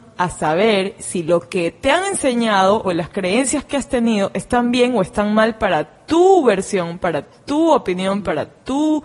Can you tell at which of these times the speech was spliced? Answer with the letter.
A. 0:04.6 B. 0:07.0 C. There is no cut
C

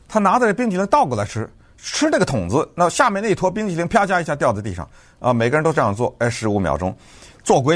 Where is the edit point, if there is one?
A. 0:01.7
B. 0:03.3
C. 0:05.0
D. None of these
D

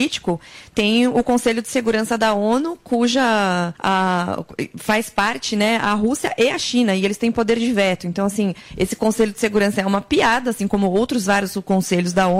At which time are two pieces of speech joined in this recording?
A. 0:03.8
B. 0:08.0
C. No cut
A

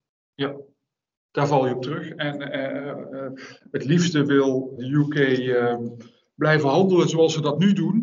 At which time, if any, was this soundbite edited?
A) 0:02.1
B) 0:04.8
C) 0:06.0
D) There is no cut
B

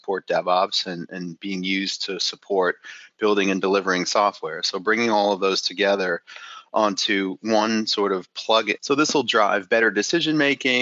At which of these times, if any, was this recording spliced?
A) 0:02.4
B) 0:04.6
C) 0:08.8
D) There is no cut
C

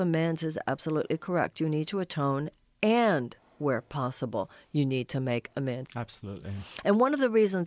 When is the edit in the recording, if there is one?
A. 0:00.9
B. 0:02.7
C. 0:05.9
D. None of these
C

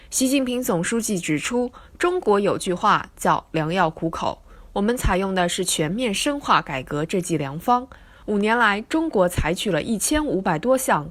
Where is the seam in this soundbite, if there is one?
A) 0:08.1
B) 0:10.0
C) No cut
C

